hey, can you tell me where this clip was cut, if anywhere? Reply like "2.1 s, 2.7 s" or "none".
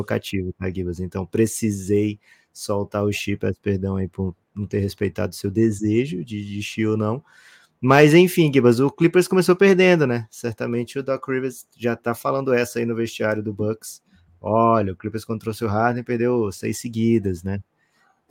none